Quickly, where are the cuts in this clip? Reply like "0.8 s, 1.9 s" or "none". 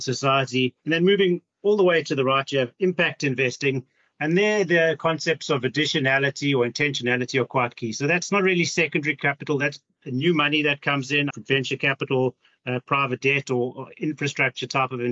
11.3 s